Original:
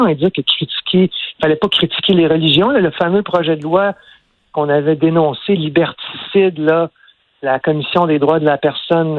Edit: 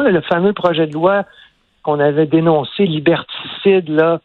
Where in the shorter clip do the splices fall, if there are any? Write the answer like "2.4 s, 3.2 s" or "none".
none